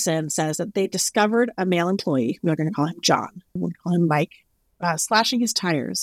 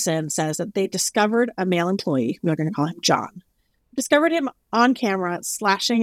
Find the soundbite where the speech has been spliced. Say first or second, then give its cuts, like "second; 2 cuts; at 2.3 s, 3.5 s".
first; 1 cut; at 3.6 s